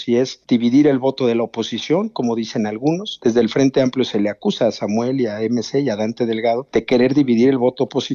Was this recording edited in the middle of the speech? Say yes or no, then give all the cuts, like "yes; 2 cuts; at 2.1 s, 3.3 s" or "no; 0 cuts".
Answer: no; 0 cuts